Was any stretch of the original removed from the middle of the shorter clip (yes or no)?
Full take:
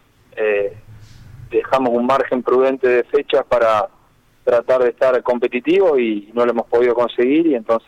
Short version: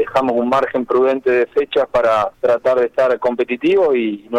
yes